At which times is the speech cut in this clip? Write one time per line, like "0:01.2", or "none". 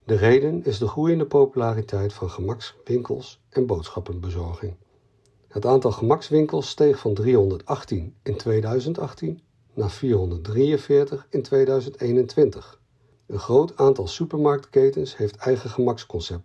none

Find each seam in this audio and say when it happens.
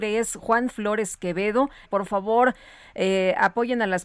0:01.8

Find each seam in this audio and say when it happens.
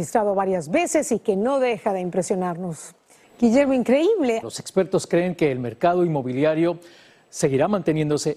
0:03.2
0:04.4

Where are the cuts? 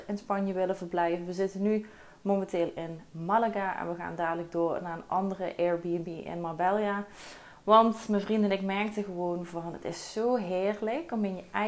none

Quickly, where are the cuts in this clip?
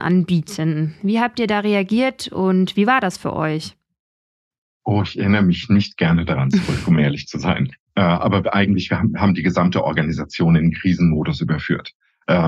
none

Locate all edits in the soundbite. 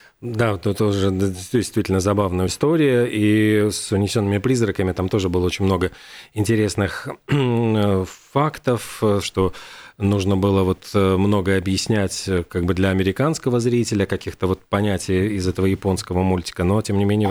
0:02.5
0:09.2

